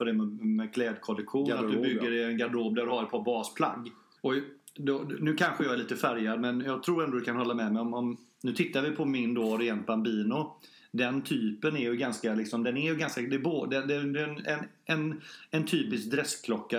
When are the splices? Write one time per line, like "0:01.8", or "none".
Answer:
0:04.2